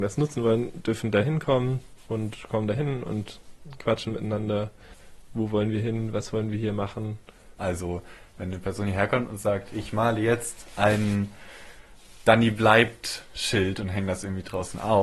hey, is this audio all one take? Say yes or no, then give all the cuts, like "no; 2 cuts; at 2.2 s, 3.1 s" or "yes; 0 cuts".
no; 1 cut; at 7.6 s